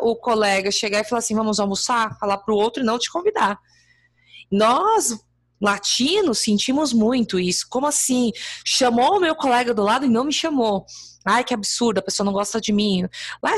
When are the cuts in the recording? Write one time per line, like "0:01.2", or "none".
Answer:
none

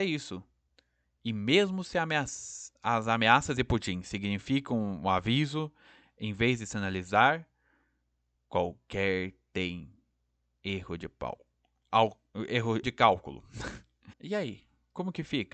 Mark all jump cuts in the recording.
0:12.8
0:14.1

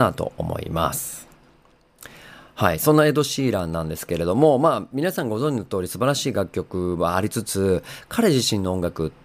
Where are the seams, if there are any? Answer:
none

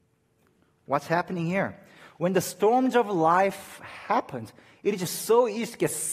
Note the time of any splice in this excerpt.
none

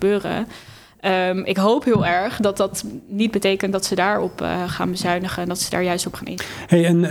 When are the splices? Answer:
none

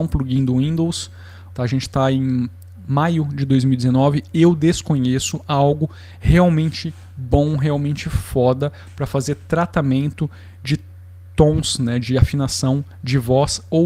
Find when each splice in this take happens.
0:01.5

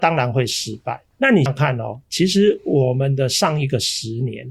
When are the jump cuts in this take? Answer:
0:01.5

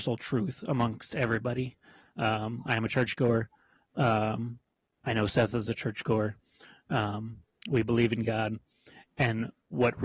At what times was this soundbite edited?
0:02.0

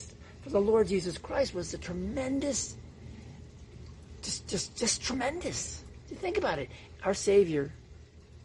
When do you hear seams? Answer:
0:07.0

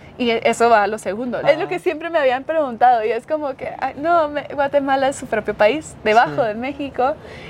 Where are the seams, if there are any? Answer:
0:01.4

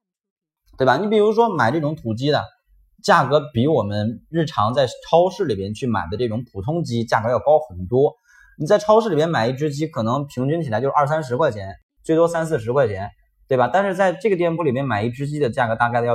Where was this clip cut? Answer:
none

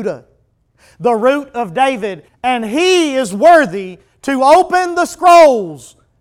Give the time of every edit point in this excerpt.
0:02.3

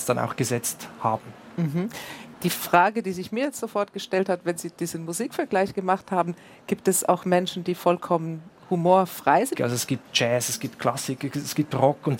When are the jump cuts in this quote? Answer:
0:09.5

